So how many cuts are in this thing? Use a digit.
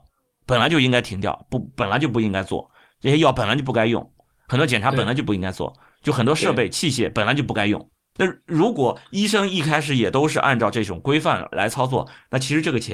2